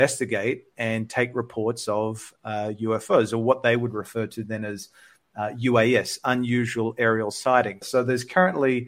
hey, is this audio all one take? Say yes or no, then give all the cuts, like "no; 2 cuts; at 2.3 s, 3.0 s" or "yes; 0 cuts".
no; 1 cut; at 7.8 s